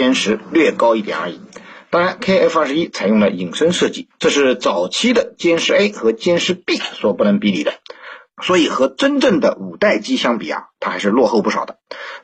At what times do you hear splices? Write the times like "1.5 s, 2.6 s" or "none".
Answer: 4.1 s, 8.3 s